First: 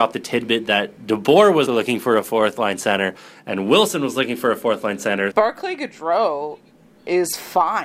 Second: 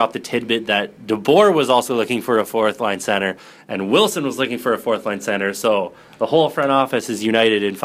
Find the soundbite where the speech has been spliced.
first; 2 cuts; at 1.7 s, 5.3 s

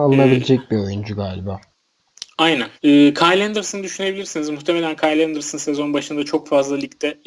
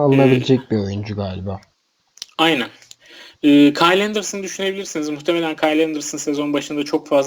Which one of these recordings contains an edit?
first; 1 cut; at 2.8 s

